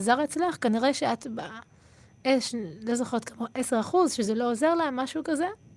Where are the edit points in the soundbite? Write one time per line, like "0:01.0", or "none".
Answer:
none